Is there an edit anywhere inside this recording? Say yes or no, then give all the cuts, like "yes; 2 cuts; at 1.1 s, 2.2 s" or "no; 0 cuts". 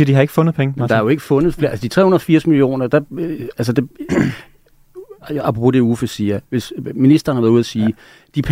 no; 0 cuts